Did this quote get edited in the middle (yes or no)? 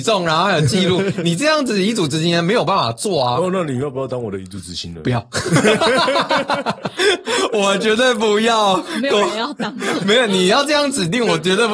no